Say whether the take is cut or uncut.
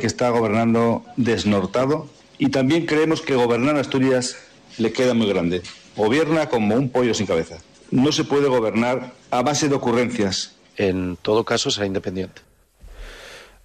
cut